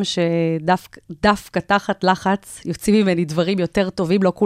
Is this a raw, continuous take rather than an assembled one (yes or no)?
yes